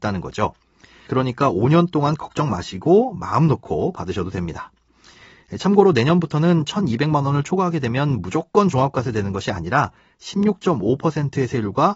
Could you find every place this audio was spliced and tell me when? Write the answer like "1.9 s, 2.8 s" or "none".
1.1 s